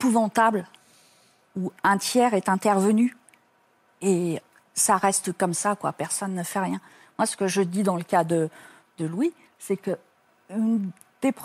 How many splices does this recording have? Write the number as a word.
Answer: zero